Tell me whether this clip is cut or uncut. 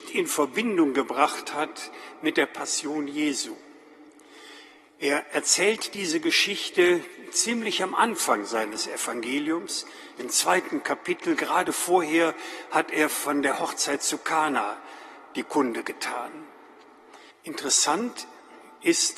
cut